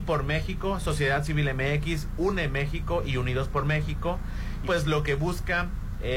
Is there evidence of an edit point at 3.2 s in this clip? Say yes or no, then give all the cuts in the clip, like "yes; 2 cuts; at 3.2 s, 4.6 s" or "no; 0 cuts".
no; 1 cut; at 4.6 s